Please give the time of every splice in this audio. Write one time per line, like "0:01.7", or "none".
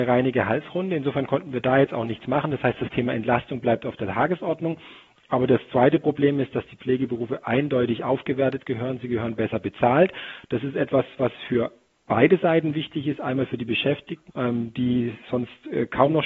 0:14.3